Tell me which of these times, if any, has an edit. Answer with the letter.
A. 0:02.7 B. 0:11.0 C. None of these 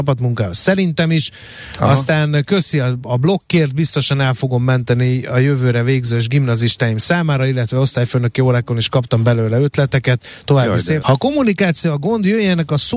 B